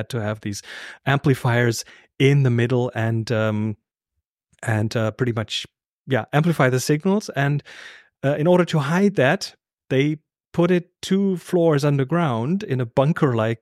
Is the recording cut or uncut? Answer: uncut